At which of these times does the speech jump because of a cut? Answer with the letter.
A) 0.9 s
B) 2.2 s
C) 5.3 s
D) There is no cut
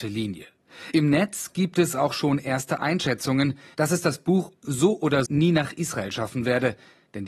C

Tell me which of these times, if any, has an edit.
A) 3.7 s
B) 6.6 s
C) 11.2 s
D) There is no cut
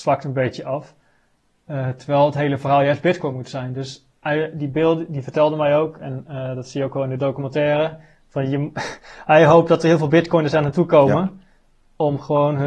D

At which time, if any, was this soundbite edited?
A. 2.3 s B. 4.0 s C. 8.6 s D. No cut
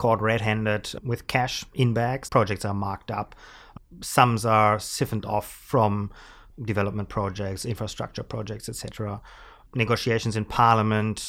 A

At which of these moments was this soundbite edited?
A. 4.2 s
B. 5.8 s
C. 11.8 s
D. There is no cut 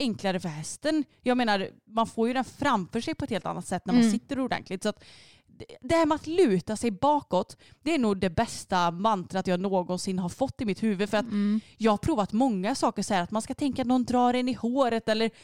D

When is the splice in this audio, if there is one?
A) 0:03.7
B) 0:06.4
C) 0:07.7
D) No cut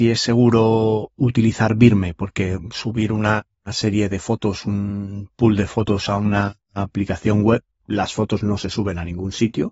C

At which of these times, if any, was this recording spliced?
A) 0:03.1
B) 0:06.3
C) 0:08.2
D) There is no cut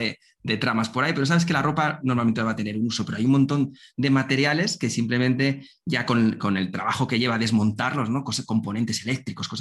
D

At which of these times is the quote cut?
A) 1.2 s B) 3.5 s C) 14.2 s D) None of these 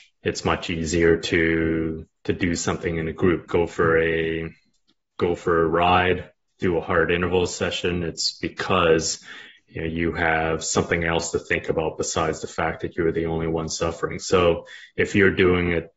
B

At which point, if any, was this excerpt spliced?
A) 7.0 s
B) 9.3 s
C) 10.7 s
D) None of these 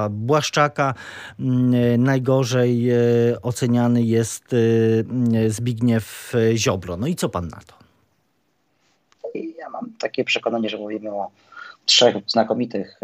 B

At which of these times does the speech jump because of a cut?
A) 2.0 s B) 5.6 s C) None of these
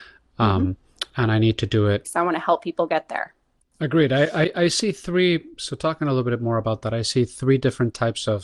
A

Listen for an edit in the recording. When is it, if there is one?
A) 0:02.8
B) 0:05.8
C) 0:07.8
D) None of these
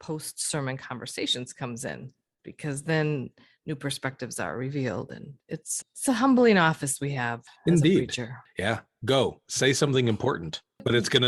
B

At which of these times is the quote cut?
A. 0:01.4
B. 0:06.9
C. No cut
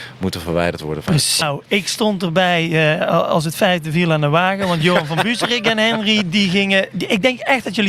A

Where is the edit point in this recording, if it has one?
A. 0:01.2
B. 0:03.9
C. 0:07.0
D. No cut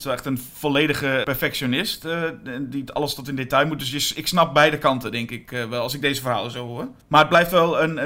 A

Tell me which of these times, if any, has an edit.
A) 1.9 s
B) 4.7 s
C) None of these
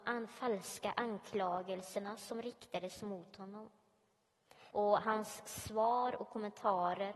B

